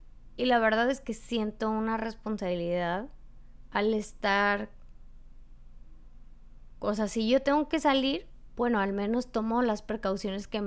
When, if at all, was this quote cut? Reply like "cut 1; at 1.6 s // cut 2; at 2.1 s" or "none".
none